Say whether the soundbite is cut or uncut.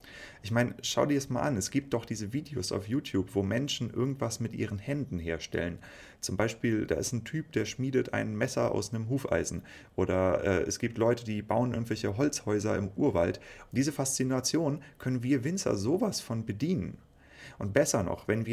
cut